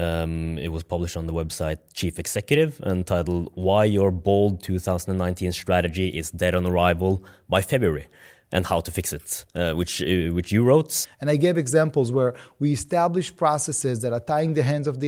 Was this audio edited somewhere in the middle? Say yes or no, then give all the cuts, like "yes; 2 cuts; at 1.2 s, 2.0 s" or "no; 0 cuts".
yes; 1 cut; at 11.0 s